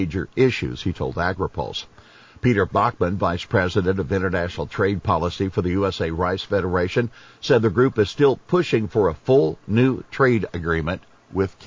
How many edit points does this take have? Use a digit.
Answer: 0